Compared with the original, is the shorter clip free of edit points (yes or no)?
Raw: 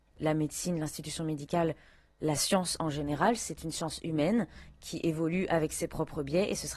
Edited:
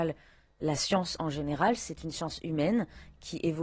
yes